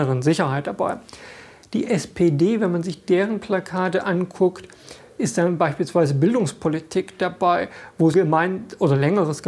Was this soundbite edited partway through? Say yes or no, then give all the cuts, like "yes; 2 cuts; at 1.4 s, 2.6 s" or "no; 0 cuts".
yes; 1 cut; at 8.1 s